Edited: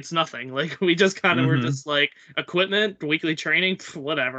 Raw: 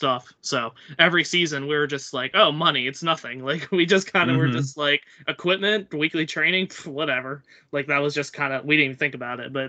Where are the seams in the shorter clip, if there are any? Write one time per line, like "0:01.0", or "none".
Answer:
none